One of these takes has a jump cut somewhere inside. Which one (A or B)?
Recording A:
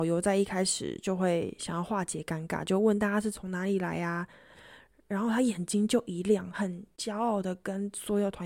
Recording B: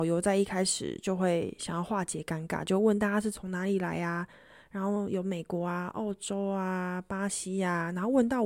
A